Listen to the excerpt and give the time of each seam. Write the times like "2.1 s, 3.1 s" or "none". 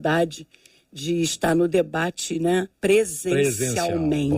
2.7 s